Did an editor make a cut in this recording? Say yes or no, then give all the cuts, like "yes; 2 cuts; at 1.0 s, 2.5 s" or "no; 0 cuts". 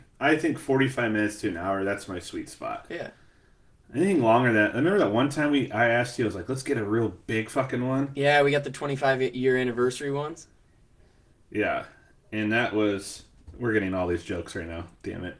no; 0 cuts